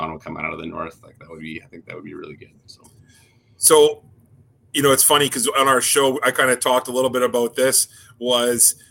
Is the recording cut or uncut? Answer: uncut